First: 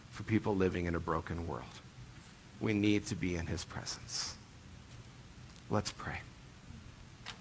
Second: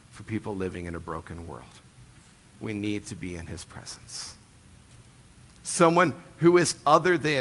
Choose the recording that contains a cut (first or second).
second